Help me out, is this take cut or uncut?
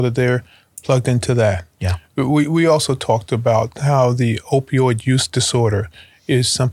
uncut